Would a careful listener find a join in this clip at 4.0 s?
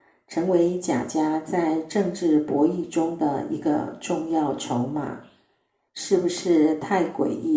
no; 1 cut; at 5.9 s

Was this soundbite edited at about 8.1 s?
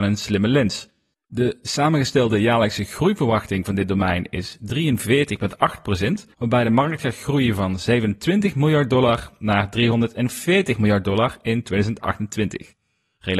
no; 2 cuts; at 1.1 s, 6.3 s

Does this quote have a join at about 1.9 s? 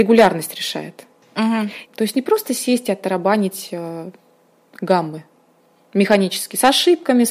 yes; 1 cut; at 1.9 s

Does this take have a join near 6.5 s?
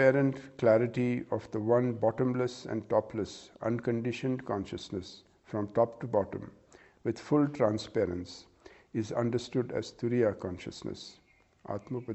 no; 0 cuts

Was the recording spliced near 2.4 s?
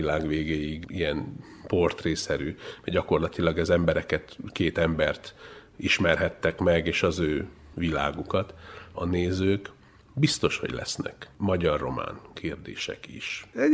no; 0 cuts

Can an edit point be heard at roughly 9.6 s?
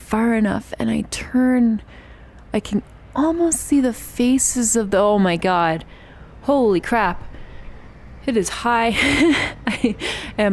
no; 0 cuts

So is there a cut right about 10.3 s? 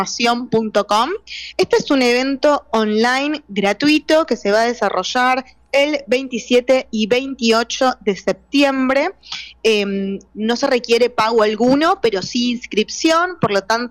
yes; 1 cut; at 10.3 s

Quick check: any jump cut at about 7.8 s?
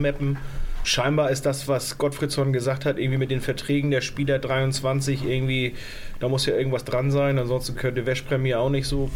yes; 1 cut; at 7.8 s

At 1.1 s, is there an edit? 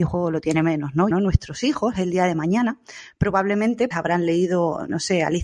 yes; 2 cuts; at 1.1 s, 3.9 s

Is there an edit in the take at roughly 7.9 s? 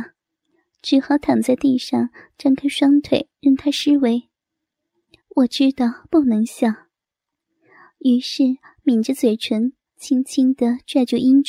no; 2 cuts; at 5.2 s, 9.9 s

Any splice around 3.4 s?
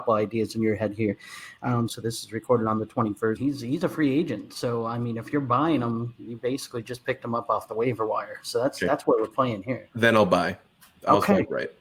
yes; 2 cuts; at 1.9 s, 3.4 s

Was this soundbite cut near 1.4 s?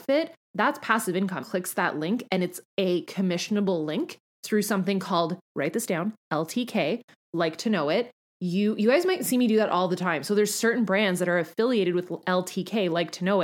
yes; 1 cut; at 1.4 s

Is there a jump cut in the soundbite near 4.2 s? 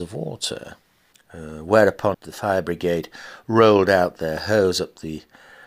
no; 2 cuts; at 1.1 s, 2.1 s

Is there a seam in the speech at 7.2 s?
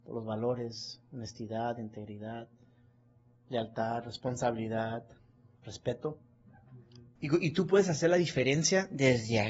yes; 2 cuts; at 5.6 s, 7.2 s

